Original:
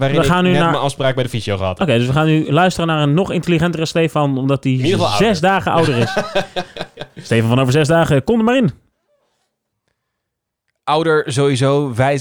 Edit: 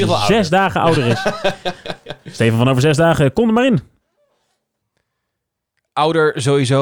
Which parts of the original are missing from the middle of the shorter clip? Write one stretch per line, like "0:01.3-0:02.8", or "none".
none